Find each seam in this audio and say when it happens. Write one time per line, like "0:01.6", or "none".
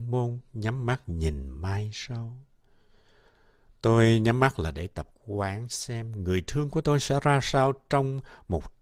none